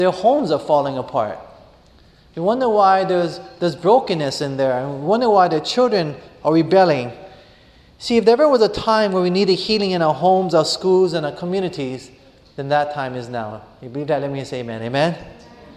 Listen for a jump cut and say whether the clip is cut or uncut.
uncut